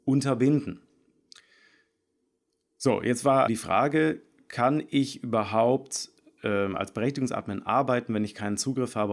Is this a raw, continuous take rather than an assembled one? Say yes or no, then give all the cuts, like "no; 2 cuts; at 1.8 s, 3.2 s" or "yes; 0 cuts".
no; 1 cut; at 3.5 s